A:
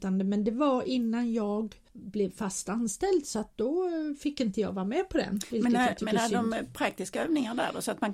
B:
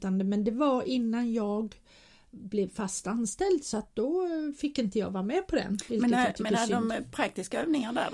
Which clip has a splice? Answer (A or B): A